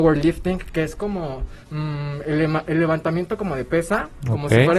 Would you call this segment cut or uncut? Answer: cut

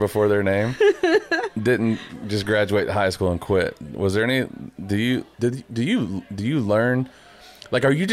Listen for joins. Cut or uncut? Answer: cut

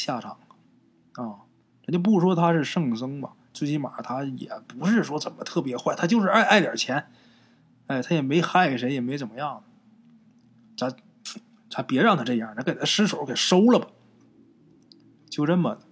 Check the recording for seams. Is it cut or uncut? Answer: uncut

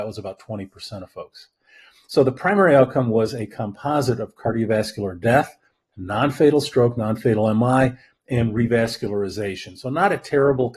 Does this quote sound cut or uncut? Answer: uncut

